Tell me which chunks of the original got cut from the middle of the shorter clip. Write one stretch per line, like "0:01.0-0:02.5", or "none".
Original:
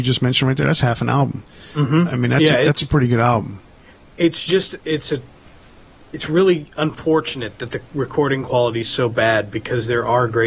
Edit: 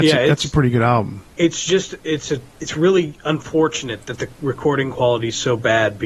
0:03.7-0:04.1
0:05.3-0:06.0